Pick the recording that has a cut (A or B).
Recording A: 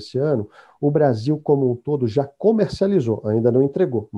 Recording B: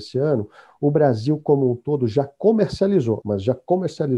B